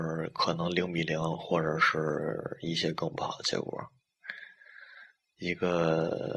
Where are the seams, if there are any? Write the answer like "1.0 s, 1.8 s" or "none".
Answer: 5.3 s